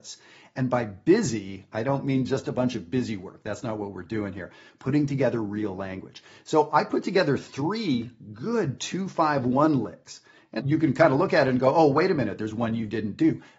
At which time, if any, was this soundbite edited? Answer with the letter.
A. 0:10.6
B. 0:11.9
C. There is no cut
A